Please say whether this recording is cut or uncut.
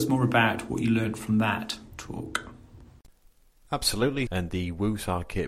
cut